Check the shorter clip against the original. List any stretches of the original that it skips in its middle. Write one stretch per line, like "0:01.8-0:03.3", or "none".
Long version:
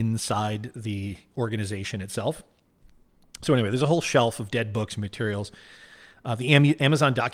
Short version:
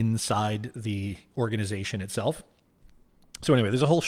none